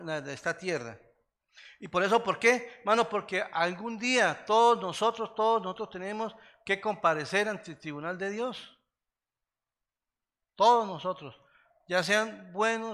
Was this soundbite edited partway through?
no; 0 cuts

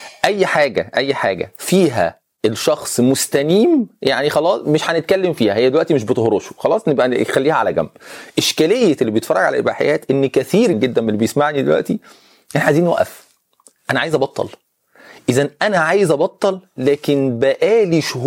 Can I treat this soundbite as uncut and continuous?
no; 1 cut; at 10.7 s

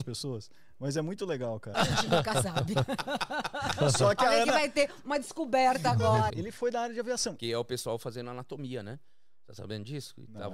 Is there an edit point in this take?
yes; 3 cuts; at 1.7 s, 6.3 s, 7.4 s

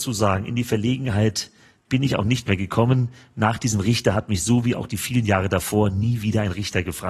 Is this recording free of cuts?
yes; 0 cuts

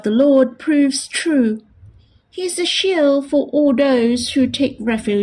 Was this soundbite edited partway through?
no; 0 cuts

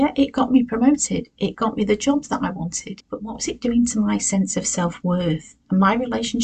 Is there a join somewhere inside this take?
yes; 1 cut; at 3.0 s

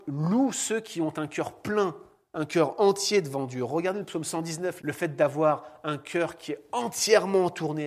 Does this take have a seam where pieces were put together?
yes; 1 cut; at 4.8 s

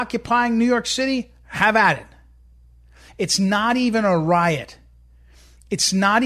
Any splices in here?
yes; 1 cut; at 3.1 s

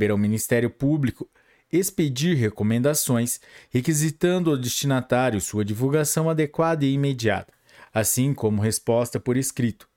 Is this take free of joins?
yes; 0 cuts

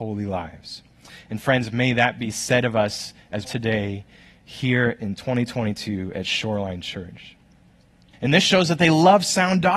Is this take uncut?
no; 2 cuts; at 3.4 s, 8.1 s

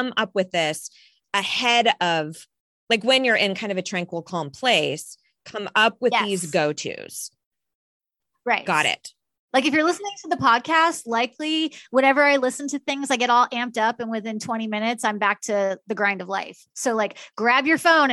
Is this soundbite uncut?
no; 1 cut; at 15.8 s

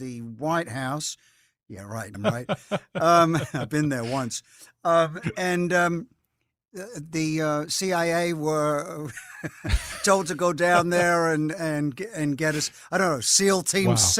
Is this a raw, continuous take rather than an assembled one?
no; 1 cut; at 2.1 s

